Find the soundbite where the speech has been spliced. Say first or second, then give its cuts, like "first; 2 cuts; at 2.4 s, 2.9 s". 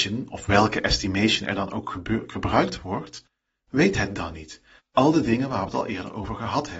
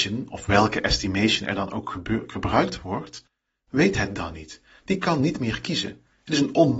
first; 1 cut; at 4.8 s